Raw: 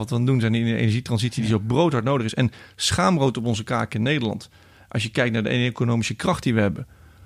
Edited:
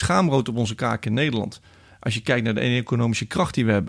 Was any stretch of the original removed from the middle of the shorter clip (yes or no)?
no